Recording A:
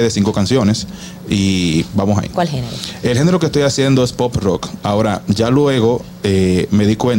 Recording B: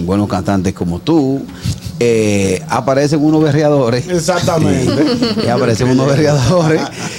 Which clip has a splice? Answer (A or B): A